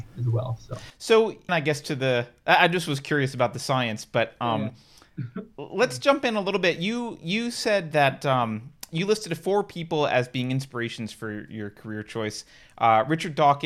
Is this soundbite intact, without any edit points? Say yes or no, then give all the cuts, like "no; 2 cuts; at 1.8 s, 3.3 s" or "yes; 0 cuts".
no; 1 cut; at 1.5 s